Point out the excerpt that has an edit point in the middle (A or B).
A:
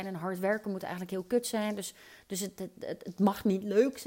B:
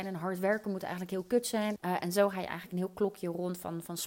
B